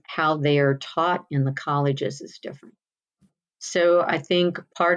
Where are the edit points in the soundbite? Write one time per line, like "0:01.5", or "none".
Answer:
none